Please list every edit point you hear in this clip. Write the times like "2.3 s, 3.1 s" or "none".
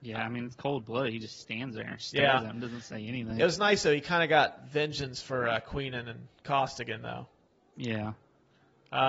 none